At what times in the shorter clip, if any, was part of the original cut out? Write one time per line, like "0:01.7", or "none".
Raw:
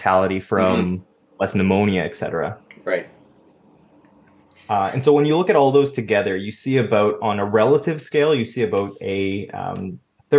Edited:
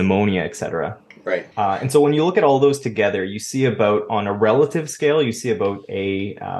0:01.5